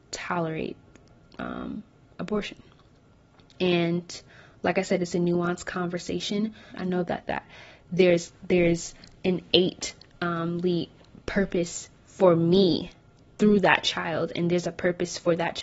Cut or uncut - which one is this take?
cut